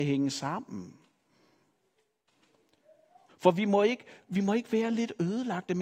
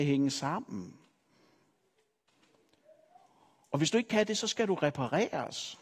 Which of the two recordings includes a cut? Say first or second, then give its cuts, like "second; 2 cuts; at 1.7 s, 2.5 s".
first; 1 cut; at 3.3 s